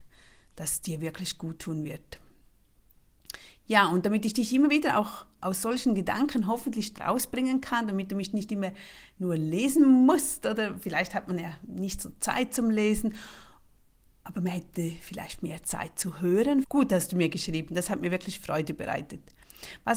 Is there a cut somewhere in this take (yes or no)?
yes